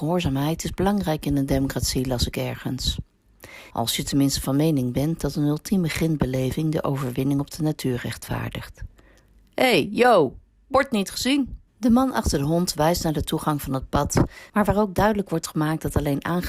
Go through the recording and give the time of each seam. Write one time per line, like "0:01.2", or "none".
0:03.7
0:11.7
0:14.5

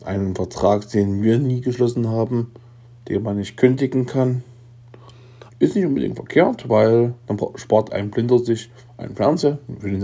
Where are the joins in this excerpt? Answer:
0:05.5

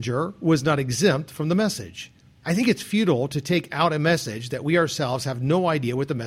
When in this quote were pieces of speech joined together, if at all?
0:02.4

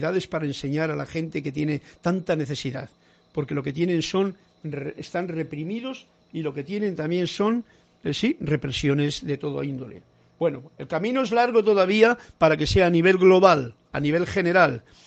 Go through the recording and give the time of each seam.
none

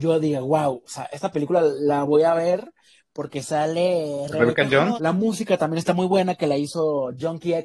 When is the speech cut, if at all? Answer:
0:04.9

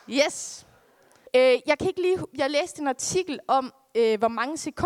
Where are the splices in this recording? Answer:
0:01.3

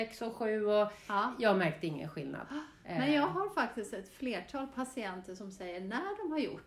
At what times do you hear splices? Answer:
none

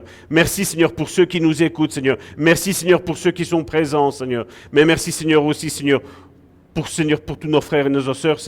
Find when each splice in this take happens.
none

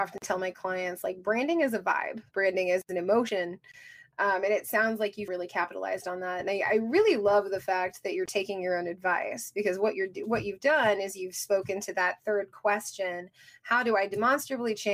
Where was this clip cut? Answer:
0:02.3
0:05.3

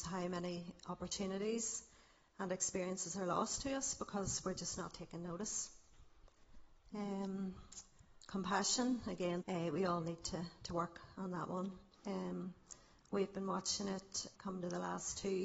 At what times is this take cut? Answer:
0:09.4
0:12.0
0:14.3

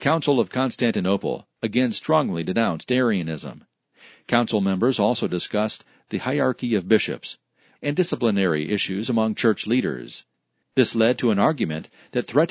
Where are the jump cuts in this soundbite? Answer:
0:07.7
0:10.6

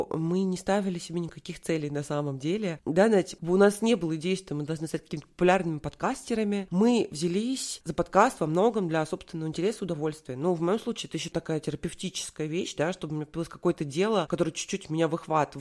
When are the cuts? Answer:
none

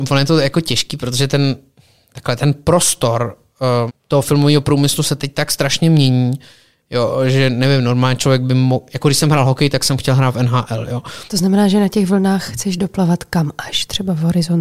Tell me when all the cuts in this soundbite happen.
0:03.9
0:11.3

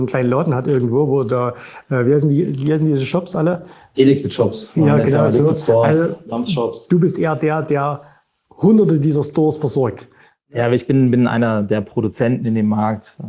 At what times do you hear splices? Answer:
none

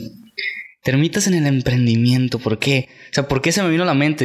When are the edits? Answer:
none

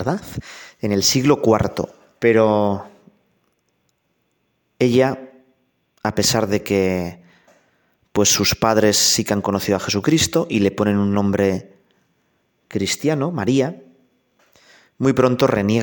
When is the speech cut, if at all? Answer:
0:02.2

